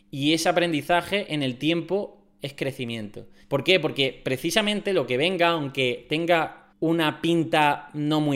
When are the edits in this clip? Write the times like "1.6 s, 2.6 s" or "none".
3.4 s, 6.7 s